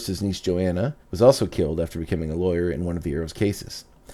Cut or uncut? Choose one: cut